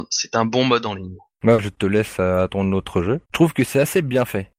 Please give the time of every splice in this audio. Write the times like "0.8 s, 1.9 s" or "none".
1.3 s, 3.2 s